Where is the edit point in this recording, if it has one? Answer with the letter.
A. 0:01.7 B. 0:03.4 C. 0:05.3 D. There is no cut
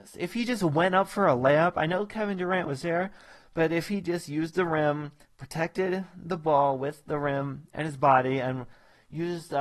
D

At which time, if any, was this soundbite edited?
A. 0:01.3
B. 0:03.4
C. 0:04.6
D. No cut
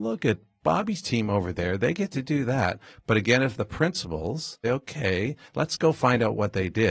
C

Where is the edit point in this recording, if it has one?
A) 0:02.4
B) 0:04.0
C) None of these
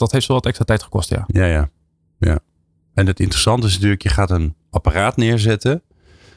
C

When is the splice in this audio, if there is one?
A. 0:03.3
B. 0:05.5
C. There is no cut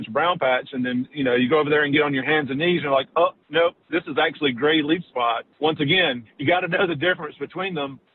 B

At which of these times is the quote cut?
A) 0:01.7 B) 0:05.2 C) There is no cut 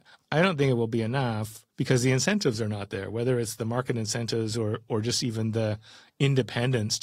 A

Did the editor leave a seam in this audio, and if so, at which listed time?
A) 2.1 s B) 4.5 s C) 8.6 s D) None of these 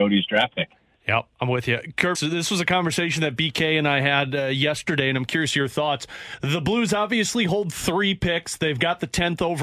A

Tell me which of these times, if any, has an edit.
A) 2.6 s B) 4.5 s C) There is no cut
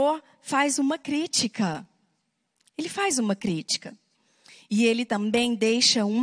C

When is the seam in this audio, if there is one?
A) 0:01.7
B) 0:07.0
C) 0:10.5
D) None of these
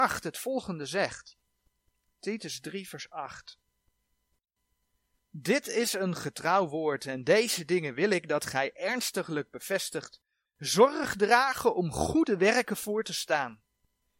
C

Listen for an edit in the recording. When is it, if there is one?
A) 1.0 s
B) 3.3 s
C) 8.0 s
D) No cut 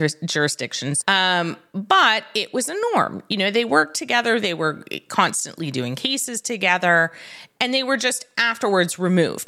A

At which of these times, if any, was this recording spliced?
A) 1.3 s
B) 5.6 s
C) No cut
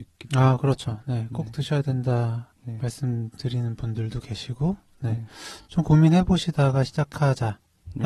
C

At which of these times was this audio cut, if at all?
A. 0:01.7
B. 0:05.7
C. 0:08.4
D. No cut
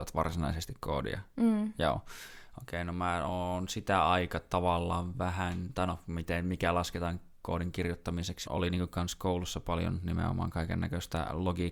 C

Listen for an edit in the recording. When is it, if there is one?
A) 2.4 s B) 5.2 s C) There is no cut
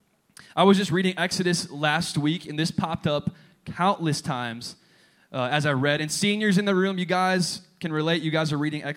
C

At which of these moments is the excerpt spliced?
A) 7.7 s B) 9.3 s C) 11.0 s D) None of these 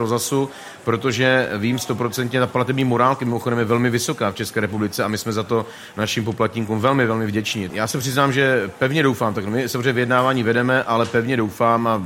A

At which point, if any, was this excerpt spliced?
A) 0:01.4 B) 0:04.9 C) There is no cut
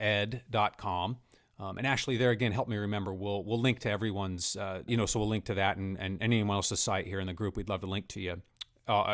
B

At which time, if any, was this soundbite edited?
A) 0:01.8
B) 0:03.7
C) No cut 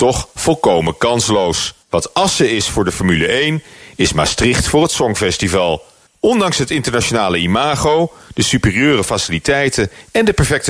A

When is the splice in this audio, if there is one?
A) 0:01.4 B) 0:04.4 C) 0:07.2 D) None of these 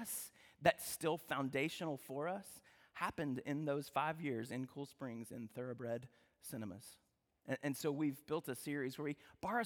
D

